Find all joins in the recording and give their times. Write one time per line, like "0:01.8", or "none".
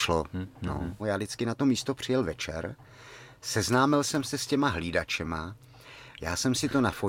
0:01.0
0:06.2